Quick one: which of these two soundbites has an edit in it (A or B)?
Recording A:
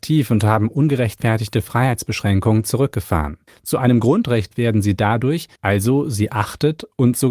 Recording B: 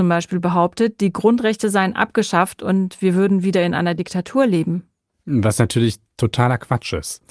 A